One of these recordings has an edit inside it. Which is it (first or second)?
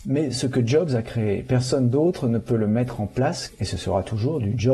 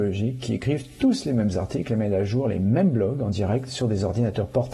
first